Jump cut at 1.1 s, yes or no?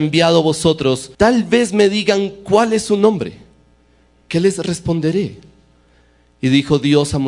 yes